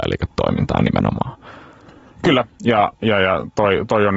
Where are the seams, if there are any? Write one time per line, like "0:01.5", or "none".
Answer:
none